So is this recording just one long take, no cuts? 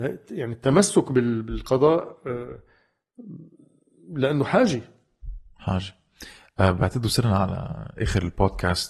yes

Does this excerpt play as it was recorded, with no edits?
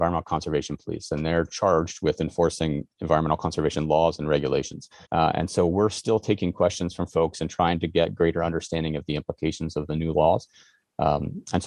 no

